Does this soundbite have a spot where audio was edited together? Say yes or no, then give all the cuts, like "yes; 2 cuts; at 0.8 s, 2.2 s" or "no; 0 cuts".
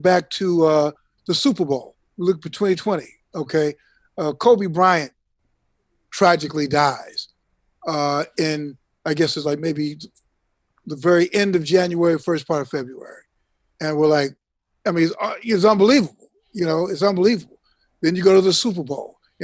no; 0 cuts